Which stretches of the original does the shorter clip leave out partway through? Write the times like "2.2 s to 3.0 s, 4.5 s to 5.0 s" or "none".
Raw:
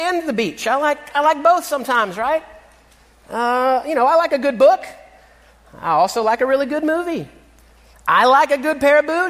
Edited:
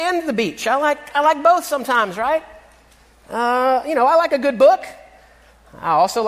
none